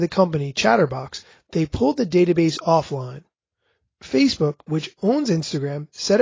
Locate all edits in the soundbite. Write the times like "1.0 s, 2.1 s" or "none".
none